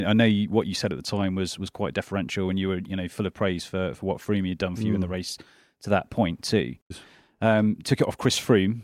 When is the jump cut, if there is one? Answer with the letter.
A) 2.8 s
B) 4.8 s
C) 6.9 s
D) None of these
C